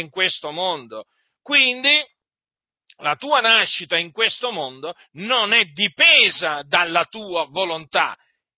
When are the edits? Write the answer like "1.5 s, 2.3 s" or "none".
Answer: none